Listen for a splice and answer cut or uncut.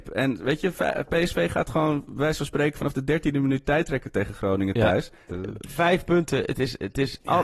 cut